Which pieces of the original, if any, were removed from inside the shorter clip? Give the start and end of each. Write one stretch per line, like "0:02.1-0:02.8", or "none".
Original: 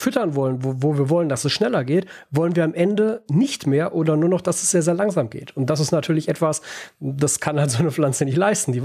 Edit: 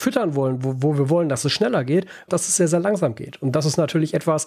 0:02.3-0:04.4